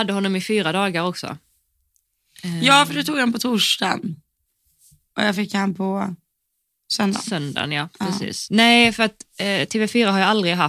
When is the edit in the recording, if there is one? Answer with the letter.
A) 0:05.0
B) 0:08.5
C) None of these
B